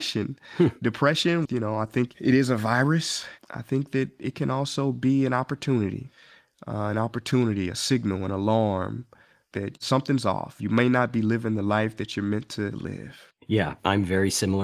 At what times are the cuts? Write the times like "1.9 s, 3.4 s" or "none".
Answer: 1.5 s